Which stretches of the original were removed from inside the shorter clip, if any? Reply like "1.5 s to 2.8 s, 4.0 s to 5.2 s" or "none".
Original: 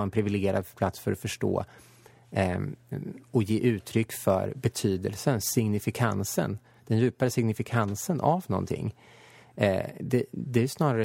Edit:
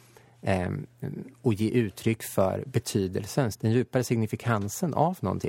5.4 s to 6.8 s